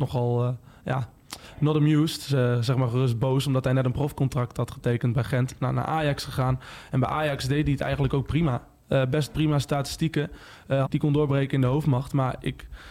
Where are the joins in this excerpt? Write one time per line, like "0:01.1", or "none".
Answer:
0:10.8